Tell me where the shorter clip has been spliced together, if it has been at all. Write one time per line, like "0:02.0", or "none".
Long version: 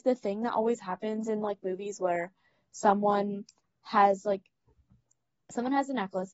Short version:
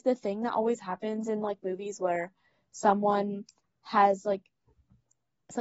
none

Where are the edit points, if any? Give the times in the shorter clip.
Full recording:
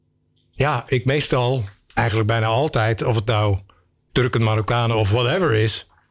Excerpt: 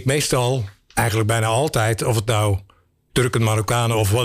none

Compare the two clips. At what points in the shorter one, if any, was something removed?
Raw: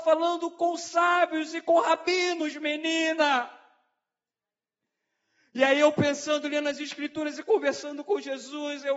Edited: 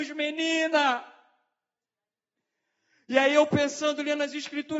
none

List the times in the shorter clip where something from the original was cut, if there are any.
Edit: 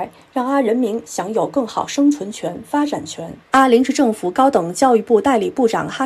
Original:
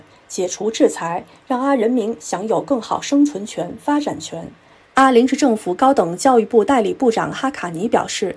0:03.4

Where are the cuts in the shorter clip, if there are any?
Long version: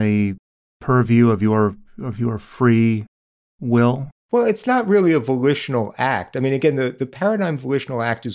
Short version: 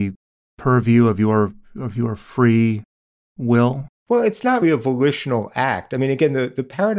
0:04.6

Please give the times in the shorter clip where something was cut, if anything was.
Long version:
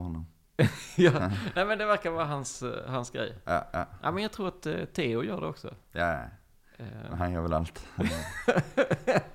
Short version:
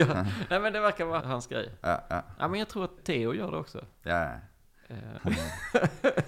0:01.2
0:03.0
0:05.2

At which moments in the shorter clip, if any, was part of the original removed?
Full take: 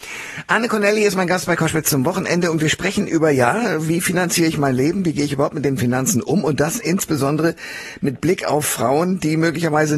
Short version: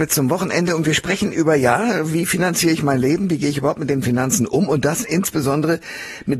none

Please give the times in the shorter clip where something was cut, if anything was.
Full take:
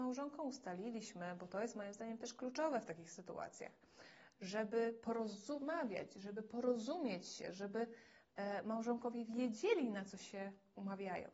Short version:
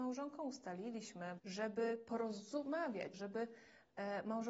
0:01.4
0:03.1

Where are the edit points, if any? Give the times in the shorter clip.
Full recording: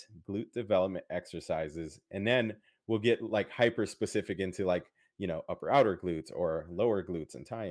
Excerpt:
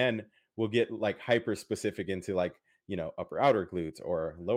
none

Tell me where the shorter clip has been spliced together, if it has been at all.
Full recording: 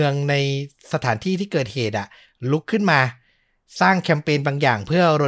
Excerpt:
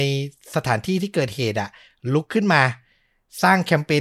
none

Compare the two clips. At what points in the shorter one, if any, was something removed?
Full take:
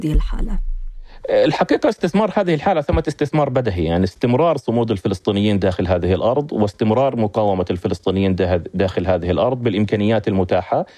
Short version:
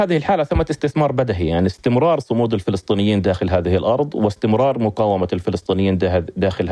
none

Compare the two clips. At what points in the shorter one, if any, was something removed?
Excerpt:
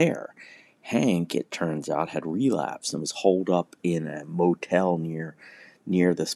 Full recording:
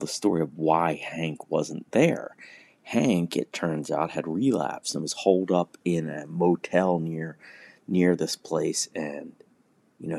none

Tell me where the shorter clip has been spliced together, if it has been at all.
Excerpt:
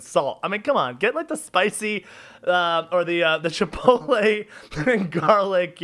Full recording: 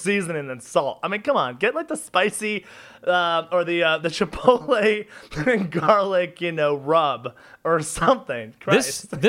none

